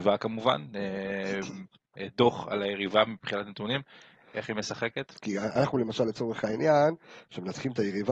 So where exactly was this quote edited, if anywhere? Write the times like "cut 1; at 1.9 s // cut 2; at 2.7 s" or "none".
cut 1; at 5.1 s